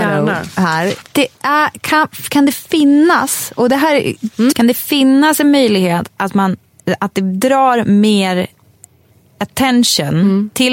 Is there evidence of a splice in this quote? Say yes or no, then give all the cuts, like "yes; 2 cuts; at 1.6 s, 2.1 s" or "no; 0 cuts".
yes; 2 cuts; at 1.0 s, 4.5 s